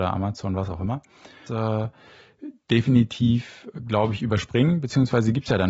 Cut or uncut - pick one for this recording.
cut